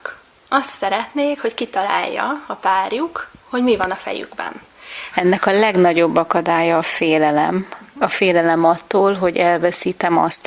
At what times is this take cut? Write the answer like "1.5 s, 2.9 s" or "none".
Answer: 5.1 s